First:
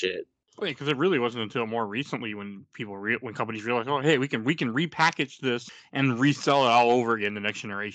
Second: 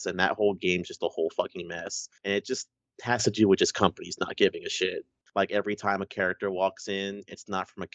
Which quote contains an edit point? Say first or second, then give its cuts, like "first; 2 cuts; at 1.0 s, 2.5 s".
second; 2 cuts; at 2.2 s, 5.3 s